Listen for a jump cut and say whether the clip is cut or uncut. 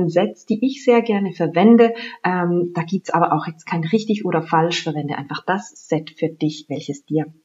uncut